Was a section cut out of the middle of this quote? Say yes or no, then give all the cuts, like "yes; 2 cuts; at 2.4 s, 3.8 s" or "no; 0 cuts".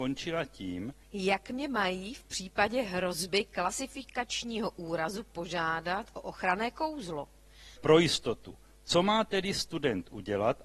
yes; 2 cuts; at 1.0 s, 7.8 s